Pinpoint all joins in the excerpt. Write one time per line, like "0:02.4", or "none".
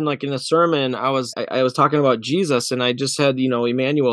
0:01.3